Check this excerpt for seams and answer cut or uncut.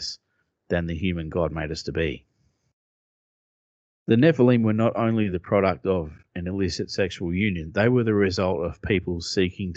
uncut